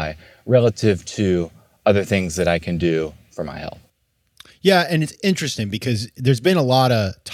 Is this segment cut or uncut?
uncut